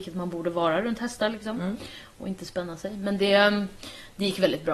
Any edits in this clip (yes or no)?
no